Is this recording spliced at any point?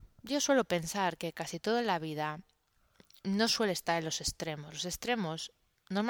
no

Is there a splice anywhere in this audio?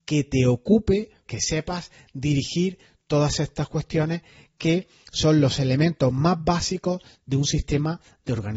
yes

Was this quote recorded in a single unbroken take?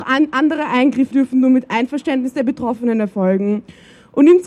no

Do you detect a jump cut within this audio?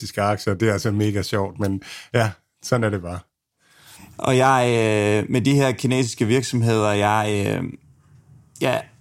no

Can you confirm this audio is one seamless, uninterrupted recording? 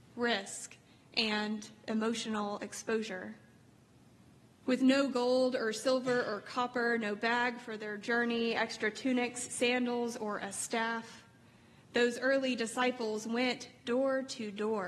no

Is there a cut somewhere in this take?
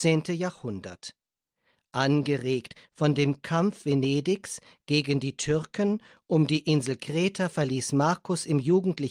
no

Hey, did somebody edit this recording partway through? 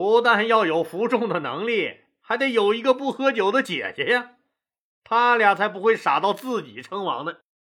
no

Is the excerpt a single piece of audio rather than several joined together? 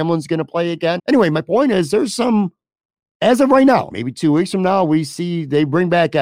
no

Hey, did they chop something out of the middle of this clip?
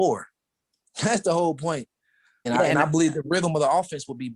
yes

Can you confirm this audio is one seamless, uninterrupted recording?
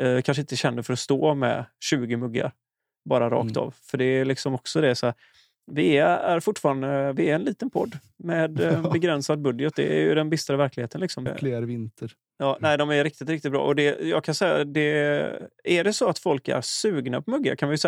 no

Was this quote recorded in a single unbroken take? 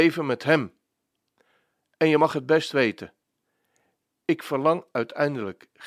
yes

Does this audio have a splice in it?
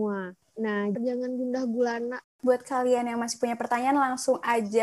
yes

